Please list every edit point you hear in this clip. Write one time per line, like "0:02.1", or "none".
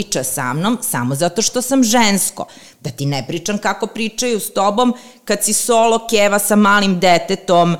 none